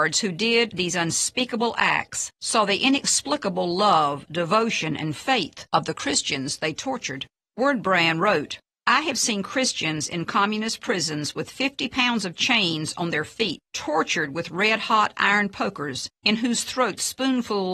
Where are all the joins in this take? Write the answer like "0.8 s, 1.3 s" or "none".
none